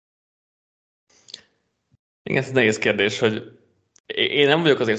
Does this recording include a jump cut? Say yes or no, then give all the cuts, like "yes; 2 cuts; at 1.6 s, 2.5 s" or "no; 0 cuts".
no; 0 cuts